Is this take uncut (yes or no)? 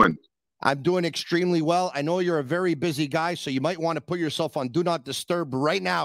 yes